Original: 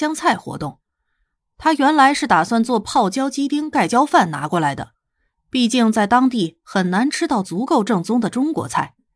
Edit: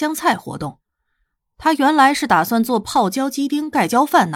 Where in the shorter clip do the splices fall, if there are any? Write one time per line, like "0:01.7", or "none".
none